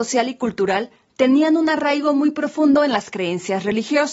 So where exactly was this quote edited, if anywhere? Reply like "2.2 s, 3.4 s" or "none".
none